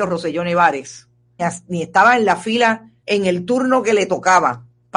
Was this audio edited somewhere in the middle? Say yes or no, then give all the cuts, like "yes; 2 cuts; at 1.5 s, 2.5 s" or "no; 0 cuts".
yes; 2 cuts; at 1.4 s, 3.0 s